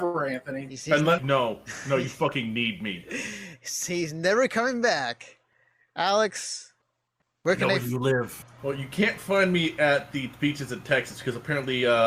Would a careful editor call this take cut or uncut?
cut